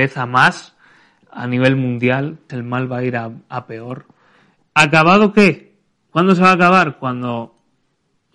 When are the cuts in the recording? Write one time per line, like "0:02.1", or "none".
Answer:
0:02.5
0:04.6
0:06.1